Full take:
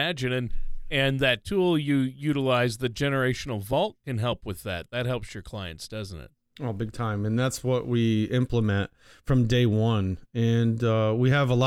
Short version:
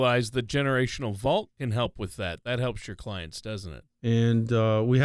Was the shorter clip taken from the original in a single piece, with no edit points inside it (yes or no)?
no